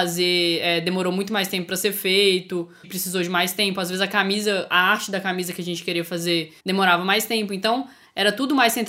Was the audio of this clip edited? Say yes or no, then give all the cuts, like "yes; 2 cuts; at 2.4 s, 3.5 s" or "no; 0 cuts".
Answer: yes; 2 cuts; at 2.8 s, 6.6 s